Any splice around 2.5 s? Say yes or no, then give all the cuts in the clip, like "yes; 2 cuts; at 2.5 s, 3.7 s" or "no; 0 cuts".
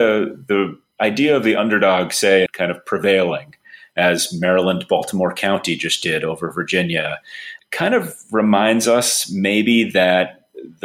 yes; 2 cuts; at 2.5 s, 7.6 s